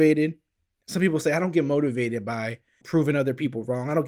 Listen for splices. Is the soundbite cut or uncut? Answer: cut